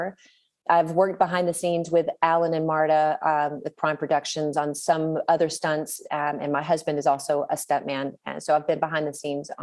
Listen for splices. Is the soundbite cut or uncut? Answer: uncut